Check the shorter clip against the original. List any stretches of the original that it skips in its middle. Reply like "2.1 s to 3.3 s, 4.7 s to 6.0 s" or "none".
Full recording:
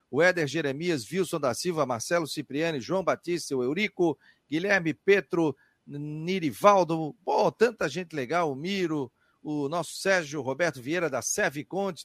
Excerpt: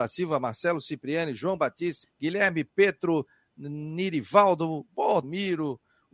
3.5 s to 4.3 s, 7.5 s to 8.5 s